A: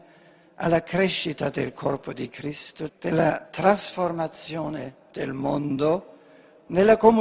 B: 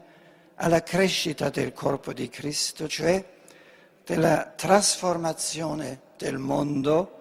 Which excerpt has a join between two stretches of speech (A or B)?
A